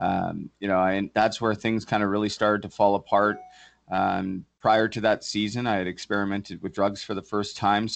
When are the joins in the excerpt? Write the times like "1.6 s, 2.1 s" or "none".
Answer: none